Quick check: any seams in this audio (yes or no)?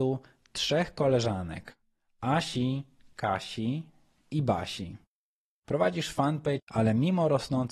yes